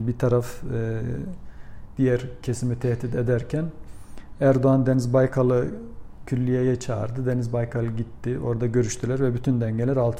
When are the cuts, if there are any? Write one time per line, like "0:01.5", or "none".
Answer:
0:02.0